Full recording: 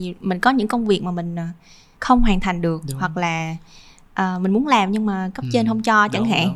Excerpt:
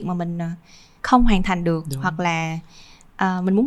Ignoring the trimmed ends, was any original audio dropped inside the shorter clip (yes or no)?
no